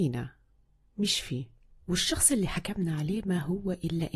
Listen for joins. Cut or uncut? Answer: cut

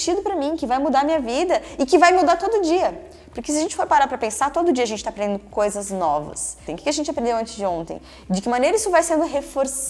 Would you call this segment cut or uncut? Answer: cut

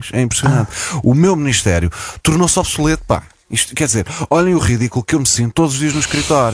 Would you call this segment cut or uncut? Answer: uncut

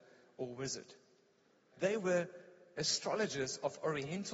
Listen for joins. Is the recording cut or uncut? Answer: cut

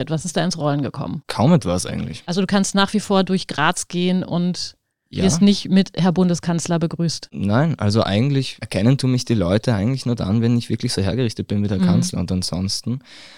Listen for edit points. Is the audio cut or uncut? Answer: uncut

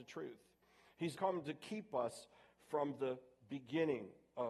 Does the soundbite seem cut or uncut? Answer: cut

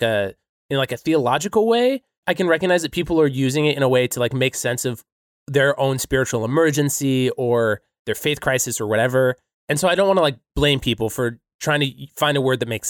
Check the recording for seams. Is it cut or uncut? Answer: cut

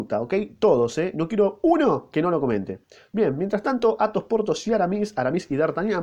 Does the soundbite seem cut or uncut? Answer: uncut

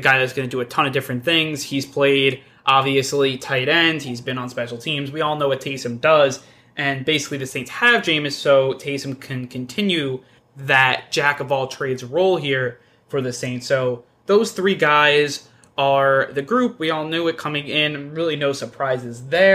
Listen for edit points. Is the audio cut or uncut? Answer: uncut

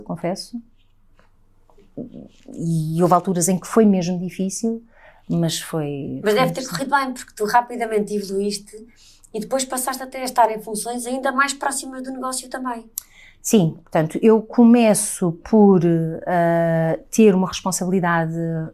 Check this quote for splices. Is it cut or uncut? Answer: uncut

